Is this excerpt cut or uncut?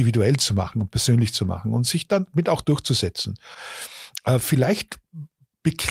uncut